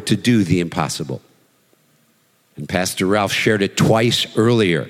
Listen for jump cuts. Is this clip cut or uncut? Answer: cut